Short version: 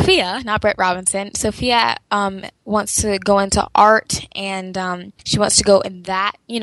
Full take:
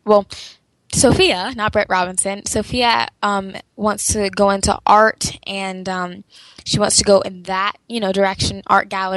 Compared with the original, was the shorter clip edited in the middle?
yes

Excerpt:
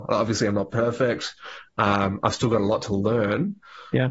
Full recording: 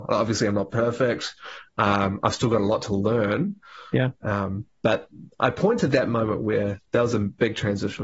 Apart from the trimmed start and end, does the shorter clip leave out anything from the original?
no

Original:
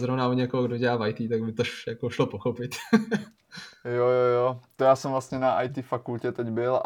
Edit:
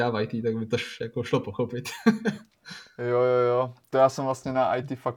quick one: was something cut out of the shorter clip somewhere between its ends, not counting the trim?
no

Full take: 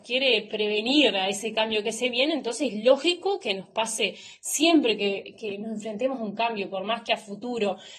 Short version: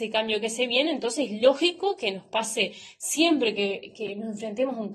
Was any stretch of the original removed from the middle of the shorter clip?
no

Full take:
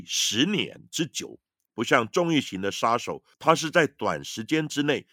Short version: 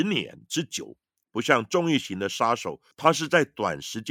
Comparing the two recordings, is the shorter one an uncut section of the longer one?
yes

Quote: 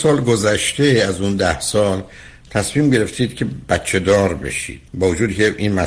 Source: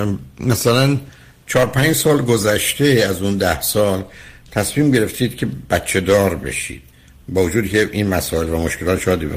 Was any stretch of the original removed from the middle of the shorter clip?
yes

